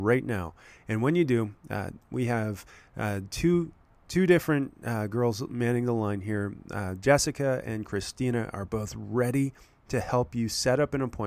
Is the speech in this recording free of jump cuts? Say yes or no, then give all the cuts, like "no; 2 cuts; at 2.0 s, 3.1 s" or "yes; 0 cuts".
yes; 0 cuts